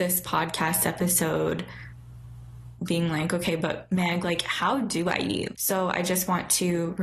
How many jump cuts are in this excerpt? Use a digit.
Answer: 1